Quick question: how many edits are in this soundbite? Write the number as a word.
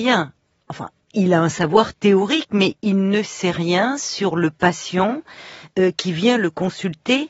zero